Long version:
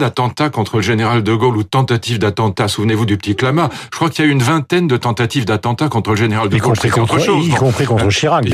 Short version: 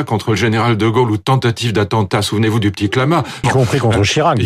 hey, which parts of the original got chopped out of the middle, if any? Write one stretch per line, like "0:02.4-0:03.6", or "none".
0:03.9-0:07.5

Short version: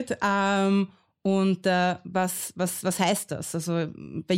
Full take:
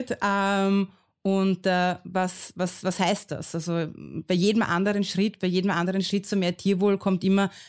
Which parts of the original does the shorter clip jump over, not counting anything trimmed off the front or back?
none

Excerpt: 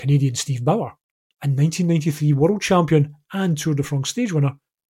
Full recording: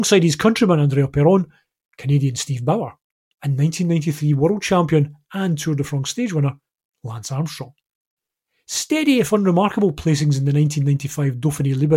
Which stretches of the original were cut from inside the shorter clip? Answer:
none

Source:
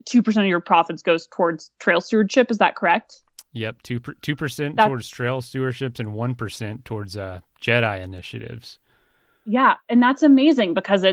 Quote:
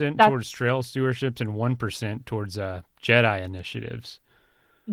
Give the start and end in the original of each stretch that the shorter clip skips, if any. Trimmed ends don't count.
none

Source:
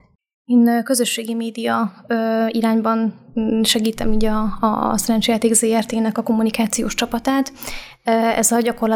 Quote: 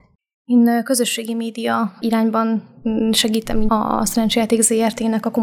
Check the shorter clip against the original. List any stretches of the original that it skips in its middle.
0:02.0-0:02.5
0:04.2-0:04.6

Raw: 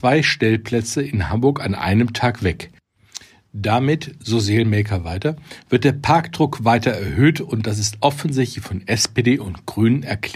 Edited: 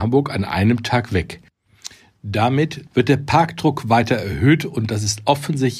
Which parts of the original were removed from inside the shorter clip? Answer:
0:04.2-0:05.6

